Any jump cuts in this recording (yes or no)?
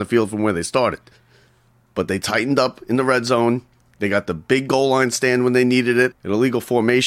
yes